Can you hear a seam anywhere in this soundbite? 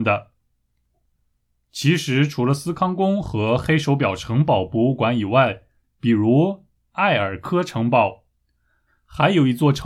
yes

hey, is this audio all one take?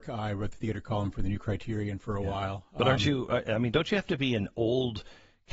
yes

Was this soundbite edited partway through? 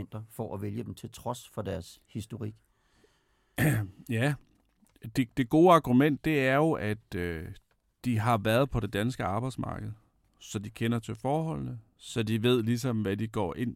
no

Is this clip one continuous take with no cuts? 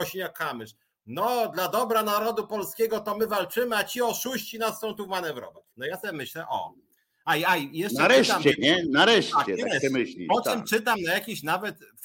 no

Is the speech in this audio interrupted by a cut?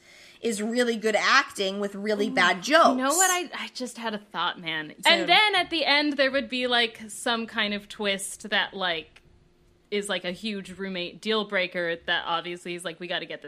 yes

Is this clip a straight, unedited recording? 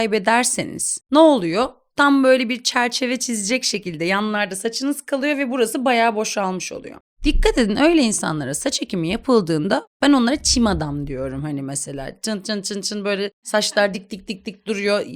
yes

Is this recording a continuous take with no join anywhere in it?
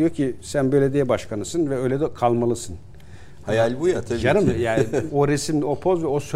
no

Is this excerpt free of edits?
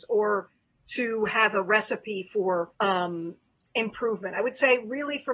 no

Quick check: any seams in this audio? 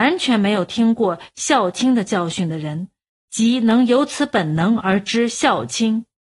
no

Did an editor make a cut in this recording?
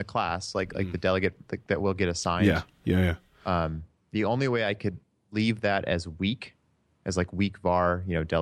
no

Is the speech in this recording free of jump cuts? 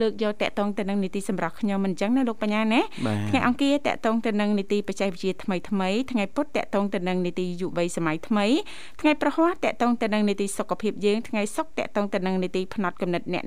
no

